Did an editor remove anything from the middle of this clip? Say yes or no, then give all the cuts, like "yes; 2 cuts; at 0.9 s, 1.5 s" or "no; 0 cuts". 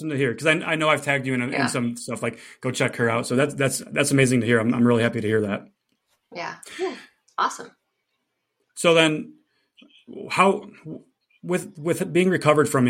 no; 0 cuts